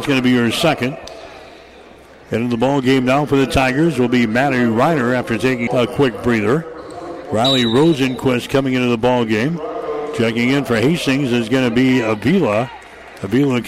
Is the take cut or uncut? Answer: cut